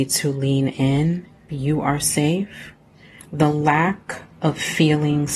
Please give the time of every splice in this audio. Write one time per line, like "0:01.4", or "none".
0:01.5
0:03.2